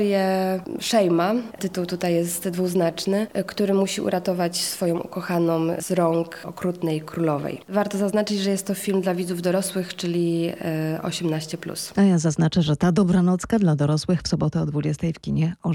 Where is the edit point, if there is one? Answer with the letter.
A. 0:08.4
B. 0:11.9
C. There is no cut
C